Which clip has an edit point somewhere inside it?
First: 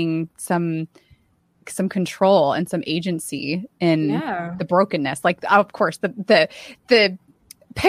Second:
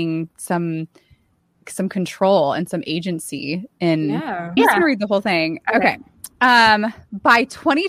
second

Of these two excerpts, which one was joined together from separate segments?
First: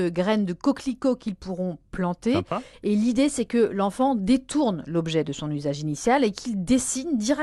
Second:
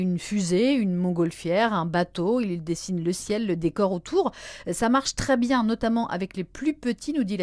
first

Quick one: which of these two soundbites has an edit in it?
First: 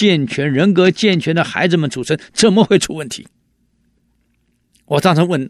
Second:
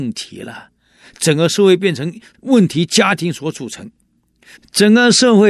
second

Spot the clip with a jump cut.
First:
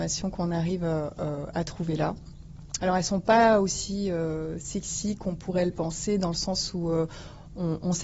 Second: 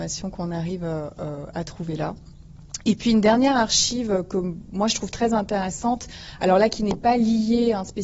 first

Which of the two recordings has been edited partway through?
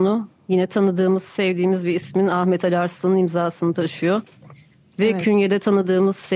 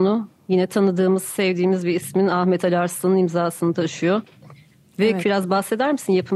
second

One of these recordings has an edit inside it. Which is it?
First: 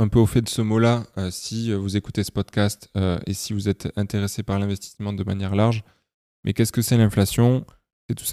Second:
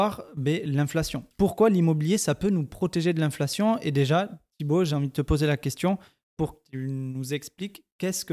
second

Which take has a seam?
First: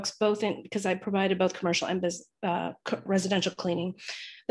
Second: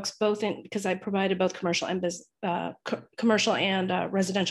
first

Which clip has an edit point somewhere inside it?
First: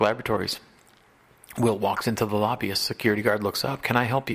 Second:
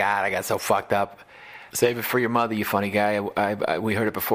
second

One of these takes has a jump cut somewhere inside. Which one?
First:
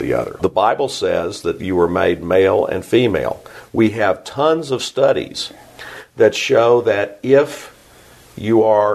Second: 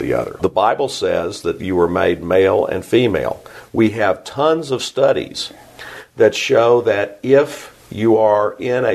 second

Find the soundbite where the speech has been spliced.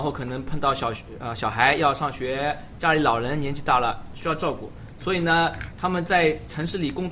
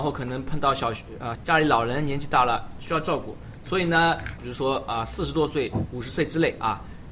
second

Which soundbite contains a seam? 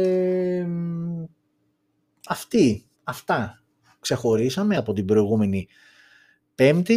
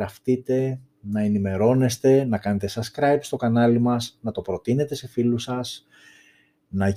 first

